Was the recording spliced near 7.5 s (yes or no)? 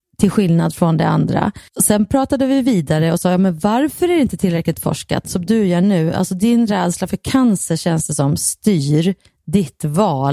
no